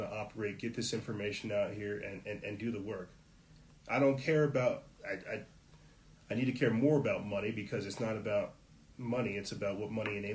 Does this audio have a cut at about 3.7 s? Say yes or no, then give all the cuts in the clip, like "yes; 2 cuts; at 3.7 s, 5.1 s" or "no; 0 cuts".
yes; 1 cut; at 3.7 s